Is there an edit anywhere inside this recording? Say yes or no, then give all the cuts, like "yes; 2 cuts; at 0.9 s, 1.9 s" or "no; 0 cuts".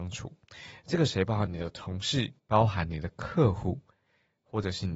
yes; 1 cut; at 2.4 s